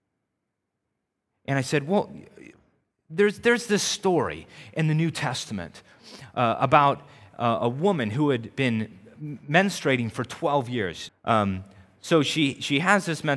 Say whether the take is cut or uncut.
cut